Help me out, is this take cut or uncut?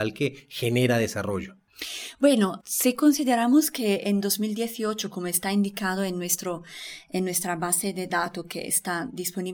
cut